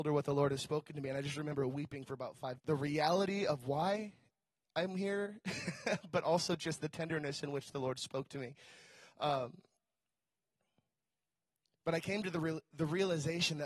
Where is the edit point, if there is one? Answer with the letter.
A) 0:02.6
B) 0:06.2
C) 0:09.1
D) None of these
A